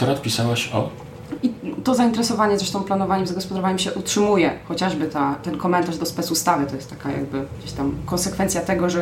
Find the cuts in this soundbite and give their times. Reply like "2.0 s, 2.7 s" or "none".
1.4 s